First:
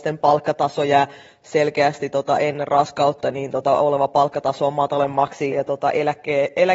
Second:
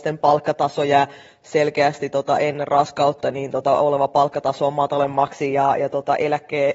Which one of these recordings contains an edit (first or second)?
first